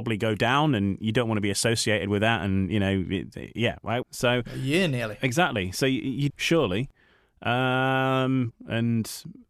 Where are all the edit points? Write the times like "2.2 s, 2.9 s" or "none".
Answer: 4.0 s, 6.3 s, 8.5 s